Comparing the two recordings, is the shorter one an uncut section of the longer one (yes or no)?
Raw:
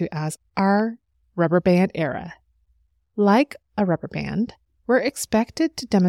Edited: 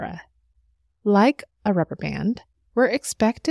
yes